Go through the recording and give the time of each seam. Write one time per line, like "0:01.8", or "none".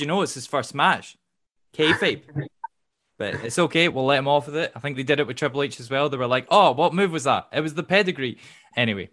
none